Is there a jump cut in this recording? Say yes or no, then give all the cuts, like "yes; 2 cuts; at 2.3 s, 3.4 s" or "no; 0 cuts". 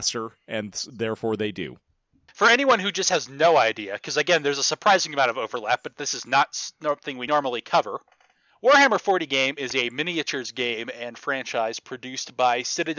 no; 0 cuts